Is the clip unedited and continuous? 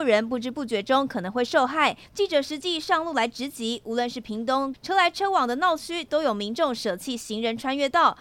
no; 2 cuts; at 2.1 s, 4.7 s

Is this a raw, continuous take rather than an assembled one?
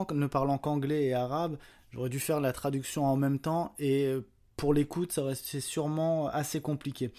yes; 0 cuts

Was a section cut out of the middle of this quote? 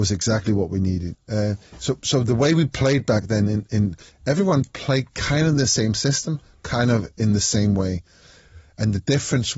yes; 1 cut; at 1.1 s

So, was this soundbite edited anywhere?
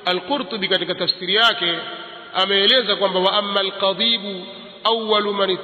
no; 0 cuts

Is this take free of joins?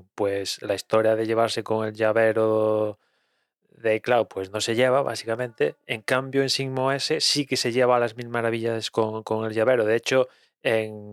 yes; 0 cuts

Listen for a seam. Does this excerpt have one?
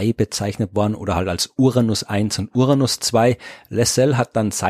no; 0 cuts

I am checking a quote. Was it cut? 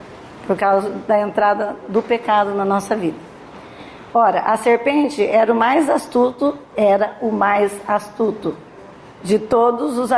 no; 0 cuts

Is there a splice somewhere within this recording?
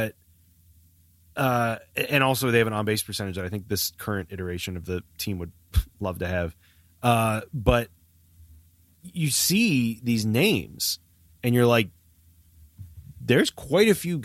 no; 0 cuts

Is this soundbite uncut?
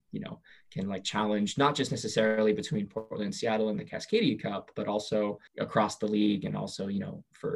no; 1 cut; at 5.5 s

